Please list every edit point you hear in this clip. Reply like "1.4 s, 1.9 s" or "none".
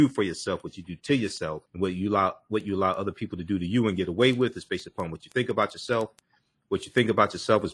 1.7 s